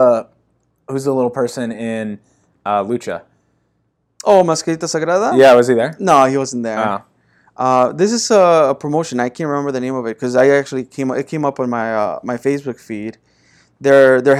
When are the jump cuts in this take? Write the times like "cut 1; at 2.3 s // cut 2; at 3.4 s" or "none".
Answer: none